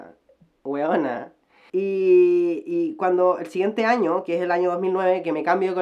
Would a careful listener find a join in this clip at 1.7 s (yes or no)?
yes